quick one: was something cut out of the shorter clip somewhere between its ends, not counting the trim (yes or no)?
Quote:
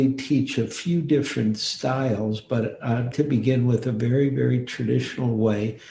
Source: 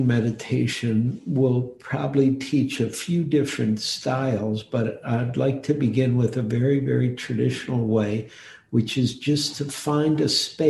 yes